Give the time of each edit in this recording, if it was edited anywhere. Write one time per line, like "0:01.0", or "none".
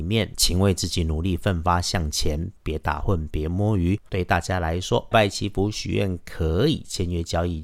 0:04.1
0:05.1